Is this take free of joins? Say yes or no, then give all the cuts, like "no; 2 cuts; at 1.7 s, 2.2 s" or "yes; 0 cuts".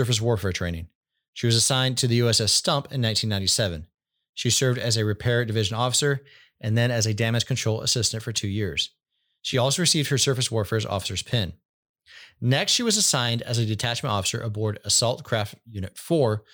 yes; 0 cuts